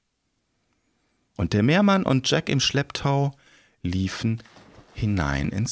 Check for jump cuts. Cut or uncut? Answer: uncut